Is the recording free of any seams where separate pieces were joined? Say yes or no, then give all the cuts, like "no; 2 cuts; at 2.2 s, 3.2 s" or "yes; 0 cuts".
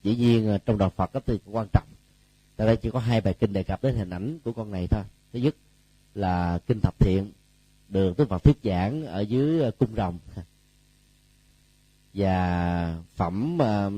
no; 1 cut; at 1.4 s